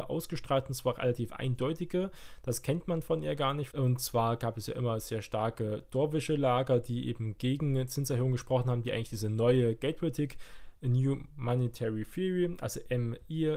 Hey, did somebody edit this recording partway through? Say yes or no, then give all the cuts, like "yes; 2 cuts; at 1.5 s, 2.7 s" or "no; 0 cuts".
yes; 1 cut; at 3.7 s